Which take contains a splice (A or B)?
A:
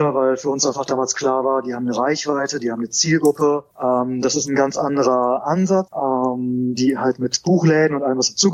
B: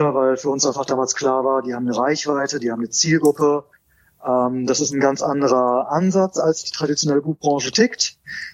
A